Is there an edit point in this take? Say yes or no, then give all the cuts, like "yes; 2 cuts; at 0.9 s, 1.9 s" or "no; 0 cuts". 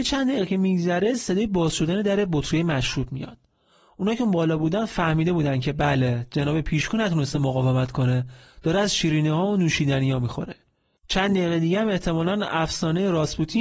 no; 0 cuts